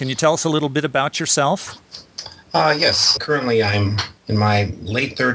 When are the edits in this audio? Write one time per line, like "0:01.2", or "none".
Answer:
0:03.2